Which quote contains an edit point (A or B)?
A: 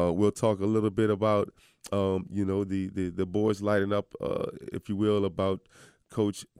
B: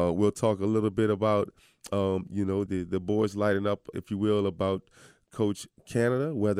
B